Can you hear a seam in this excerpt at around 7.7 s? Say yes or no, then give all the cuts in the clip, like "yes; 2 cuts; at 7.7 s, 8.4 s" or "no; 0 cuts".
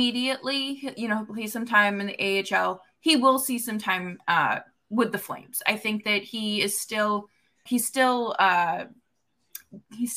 yes; 1 cut; at 7.7 s